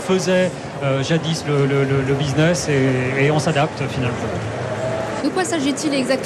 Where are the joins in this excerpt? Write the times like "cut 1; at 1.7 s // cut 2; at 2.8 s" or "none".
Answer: cut 1; at 5.2 s